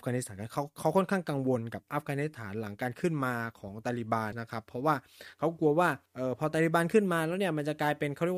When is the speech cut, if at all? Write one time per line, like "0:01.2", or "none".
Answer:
0:04.3
0:06.1